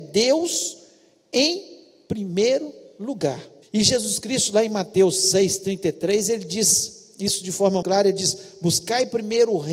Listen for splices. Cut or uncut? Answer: cut